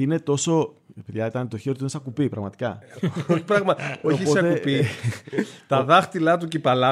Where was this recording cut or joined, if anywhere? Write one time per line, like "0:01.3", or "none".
none